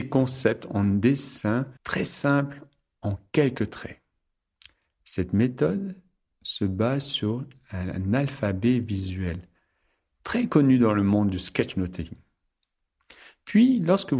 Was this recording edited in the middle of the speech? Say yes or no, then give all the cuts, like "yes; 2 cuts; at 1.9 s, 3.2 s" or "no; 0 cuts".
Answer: yes; 1 cut; at 1.8 s